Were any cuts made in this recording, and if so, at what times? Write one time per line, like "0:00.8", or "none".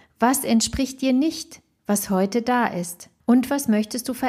0:03.2